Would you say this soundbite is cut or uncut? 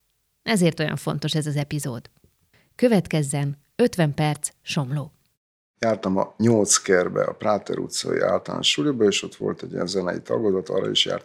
uncut